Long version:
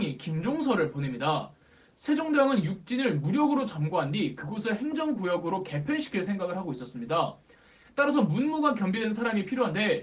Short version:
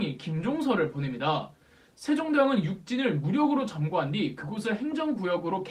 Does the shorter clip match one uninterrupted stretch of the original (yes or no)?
yes